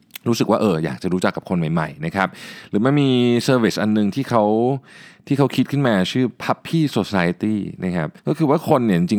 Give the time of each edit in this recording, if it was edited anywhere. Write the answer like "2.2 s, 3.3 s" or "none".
8.2 s